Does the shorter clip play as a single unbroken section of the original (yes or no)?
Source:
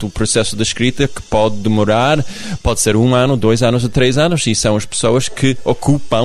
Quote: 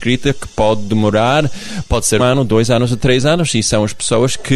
no